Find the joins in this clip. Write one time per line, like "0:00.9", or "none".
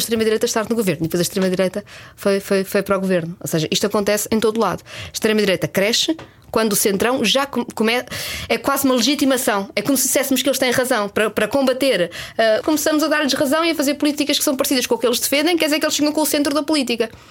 0:12.6